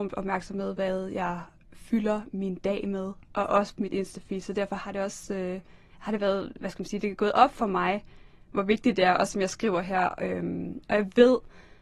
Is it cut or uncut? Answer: uncut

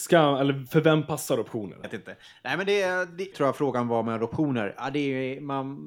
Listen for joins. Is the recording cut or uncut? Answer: cut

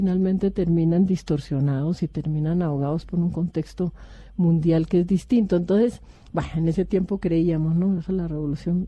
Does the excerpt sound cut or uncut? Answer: uncut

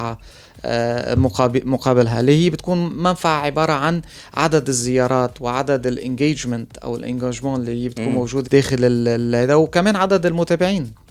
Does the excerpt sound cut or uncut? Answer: cut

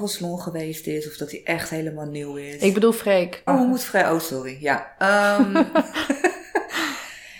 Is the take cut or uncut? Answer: cut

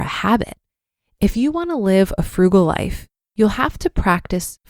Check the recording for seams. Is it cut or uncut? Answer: uncut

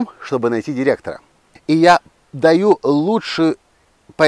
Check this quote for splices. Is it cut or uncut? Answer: cut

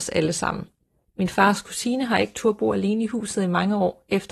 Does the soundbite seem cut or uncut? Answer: uncut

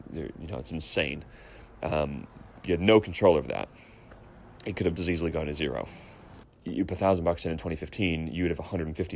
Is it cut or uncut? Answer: cut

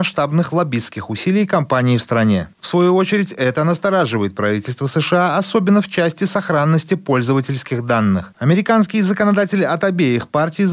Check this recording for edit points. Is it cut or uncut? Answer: cut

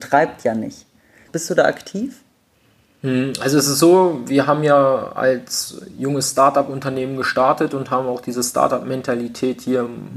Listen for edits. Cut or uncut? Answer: cut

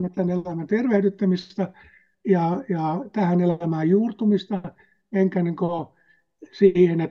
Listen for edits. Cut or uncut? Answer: uncut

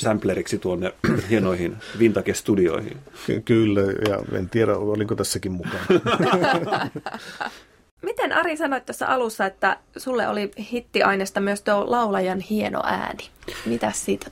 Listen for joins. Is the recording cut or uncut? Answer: uncut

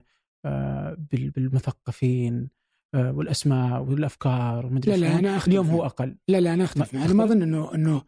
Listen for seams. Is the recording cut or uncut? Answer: uncut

